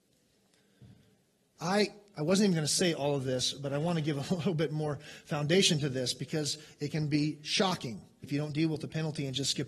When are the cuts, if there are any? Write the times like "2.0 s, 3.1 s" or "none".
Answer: 1.6 s, 8.2 s